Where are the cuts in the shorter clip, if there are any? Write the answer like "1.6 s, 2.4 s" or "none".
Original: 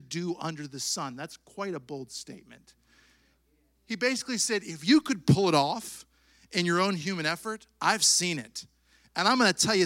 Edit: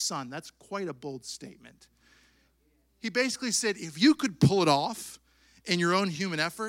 none